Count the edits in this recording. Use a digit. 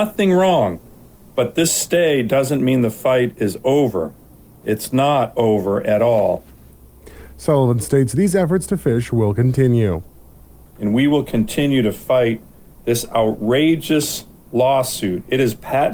0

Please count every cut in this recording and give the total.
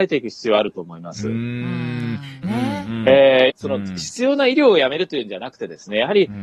2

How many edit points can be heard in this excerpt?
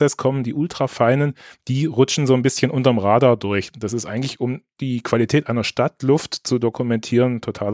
0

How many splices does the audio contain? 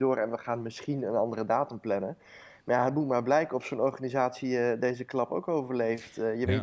0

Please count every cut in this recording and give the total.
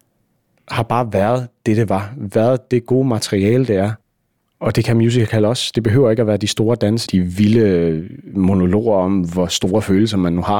1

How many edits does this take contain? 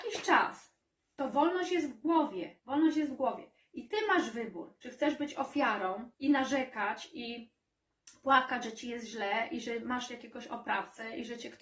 2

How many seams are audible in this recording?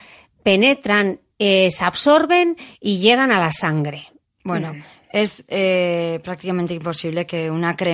0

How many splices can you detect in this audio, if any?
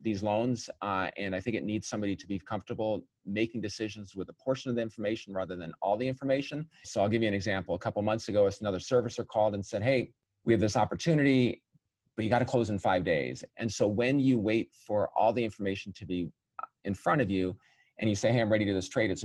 2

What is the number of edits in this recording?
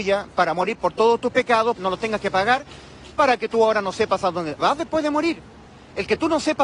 2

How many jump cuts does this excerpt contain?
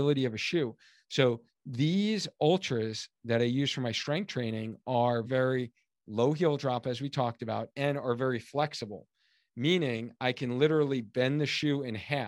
1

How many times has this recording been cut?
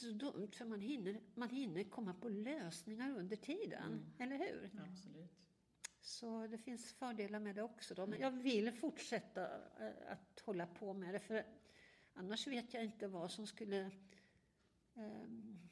1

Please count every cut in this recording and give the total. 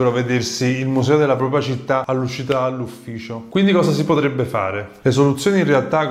1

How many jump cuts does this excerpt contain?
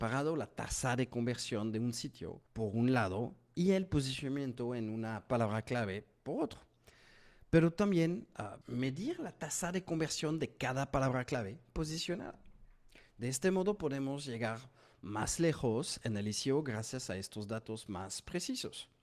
2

